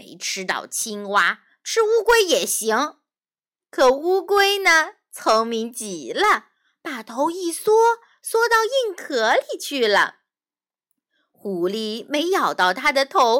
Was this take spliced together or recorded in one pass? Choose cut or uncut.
uncut